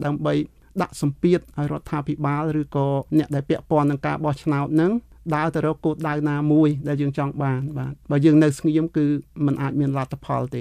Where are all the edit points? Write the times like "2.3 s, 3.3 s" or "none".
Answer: 3.1 s